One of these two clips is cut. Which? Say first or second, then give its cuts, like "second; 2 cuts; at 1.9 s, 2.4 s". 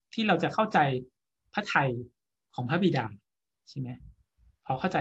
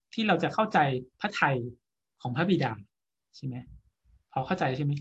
second; 1 cut; at 1.1 s